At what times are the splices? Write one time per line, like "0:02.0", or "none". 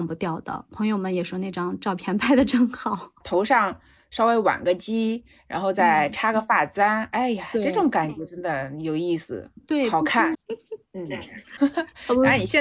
0:03.2
0:10.3
0:11.6